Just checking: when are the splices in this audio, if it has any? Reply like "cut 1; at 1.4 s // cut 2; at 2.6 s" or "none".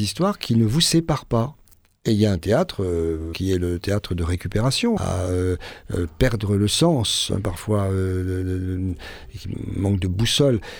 cut 1; at 3.3 s // cut 2; at 5.0 s